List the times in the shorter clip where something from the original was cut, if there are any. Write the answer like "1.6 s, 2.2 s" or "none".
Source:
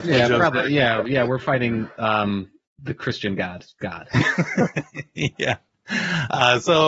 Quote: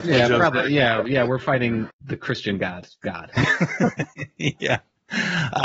1.9 s